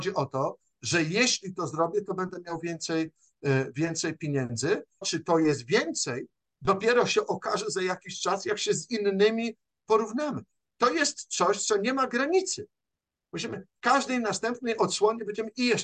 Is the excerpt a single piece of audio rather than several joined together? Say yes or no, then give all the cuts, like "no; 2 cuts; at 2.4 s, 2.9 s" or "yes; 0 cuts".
no; 1 cut; at 5.0 s